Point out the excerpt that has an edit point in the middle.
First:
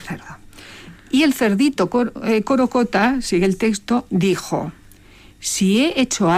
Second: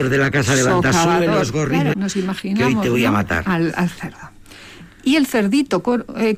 second; 1 cut; at 1.9 s

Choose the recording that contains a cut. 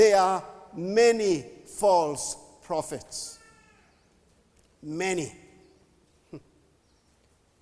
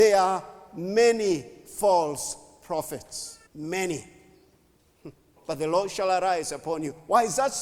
second; 2 cuts; at 3.5 s, 5.4 s

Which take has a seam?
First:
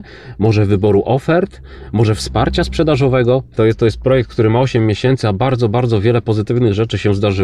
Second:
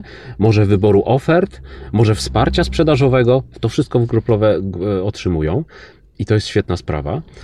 first; 1 cut; at 3.5 s

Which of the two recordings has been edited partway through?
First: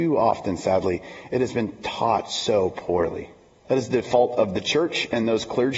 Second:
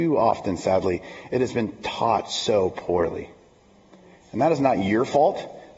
first; 1 cut; at 3.6 s

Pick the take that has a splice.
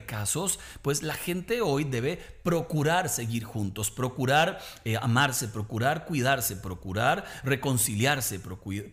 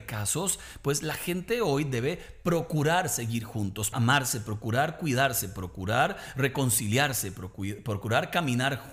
second; 1 cut; at 3.9 s

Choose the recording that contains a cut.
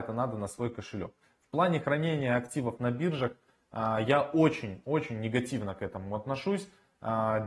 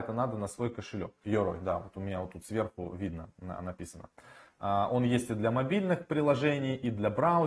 second; 1 cut; at 1.2 s

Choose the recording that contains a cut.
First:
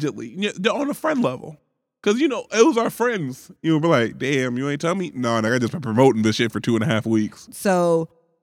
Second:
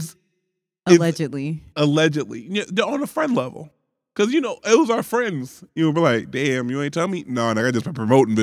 first; 1 cut; at 7.5 s

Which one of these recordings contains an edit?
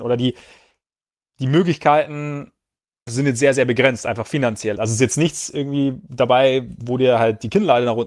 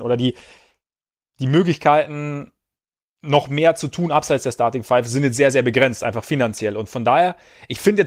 first; 2 cuts; at 3.1 s, 4.8 s

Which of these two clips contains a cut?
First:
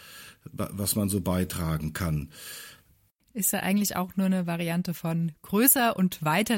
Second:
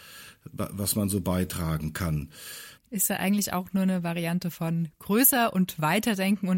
second; 1 cut; at 2.8 s

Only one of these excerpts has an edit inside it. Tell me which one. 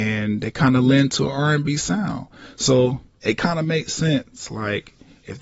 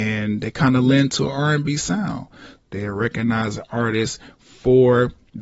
second; 1 cut; at 2.6 s

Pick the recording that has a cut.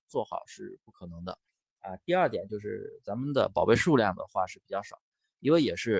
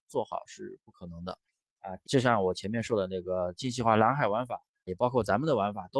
second; 2 cuts; at 2.0 s, 4.9 s

